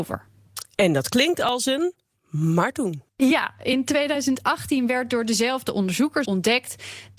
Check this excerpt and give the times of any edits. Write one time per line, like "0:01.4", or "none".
0:06.2

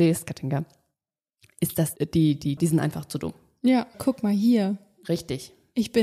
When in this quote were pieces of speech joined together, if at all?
0:02.6
0:03.9

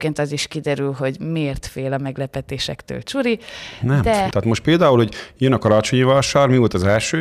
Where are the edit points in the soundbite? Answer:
0:04.3

